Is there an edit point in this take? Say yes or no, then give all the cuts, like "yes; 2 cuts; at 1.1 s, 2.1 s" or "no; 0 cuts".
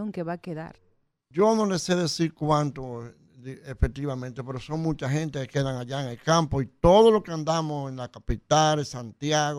yes; 1 cut; at 1.3 s